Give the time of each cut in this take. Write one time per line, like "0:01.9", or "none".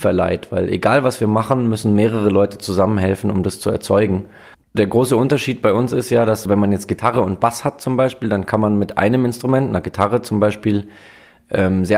0:04.5
0:06.5